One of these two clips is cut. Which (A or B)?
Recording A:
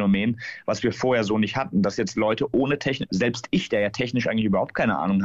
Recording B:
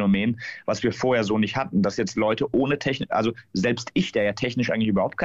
A